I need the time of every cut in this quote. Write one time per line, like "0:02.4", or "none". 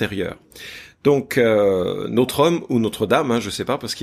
none